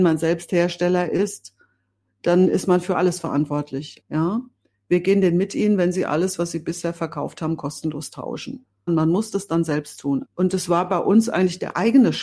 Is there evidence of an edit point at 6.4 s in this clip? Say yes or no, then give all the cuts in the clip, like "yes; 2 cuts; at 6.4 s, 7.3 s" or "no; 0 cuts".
no; 3 cuts; at 4.0 s, 8.9 s, 10.2 s